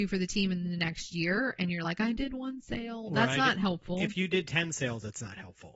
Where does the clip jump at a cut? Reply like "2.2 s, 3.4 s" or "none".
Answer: none